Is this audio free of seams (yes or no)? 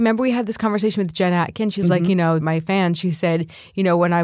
no